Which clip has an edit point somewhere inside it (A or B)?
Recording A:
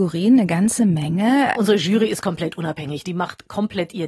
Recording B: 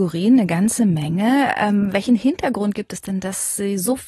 A